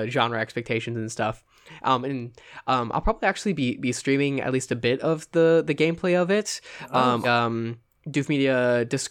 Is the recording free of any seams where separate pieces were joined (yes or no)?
no